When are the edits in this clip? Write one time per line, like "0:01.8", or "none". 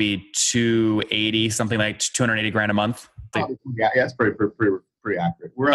0:03.3